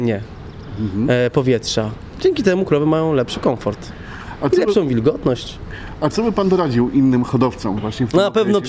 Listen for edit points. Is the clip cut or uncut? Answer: uncut